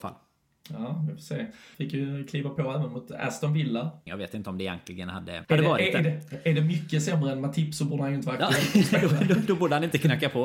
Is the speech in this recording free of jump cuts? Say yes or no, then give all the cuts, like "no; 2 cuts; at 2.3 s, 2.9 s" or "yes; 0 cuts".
no; 3 cuts; at 1.7 s, 4.1 s, 5.4 s